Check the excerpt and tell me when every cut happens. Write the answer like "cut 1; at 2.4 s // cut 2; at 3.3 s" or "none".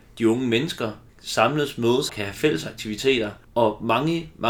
cut 1; at 1.1 s // cut 2; at 2.1 s